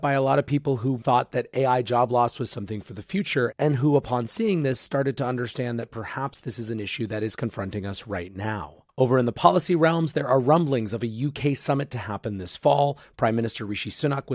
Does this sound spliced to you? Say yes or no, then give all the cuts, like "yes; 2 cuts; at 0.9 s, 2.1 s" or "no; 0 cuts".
yes; 1 cut; at 1.0 s